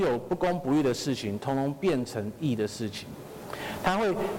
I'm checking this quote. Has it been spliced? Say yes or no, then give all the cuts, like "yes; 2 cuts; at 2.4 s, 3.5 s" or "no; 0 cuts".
no; 0 cuts